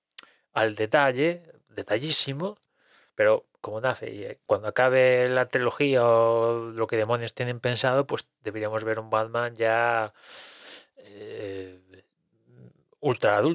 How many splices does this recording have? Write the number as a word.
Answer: one